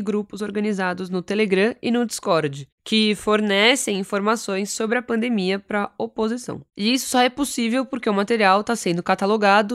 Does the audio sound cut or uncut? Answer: cut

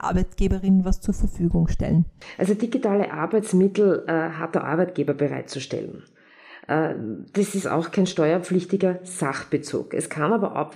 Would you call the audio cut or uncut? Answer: uncut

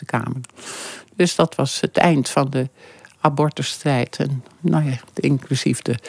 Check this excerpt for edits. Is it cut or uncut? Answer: cut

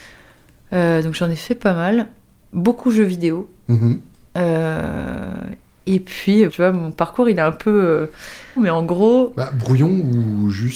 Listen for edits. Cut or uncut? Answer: cut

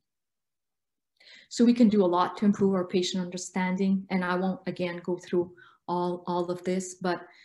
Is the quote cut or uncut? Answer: uncut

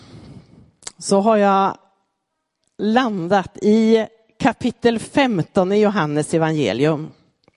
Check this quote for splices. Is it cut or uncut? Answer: uncut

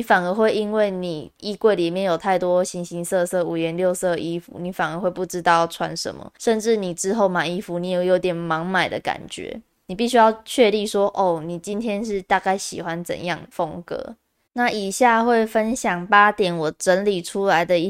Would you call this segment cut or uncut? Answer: cut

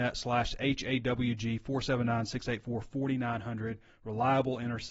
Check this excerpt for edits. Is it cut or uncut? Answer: uncut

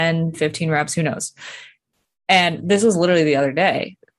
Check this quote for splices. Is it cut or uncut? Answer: uncut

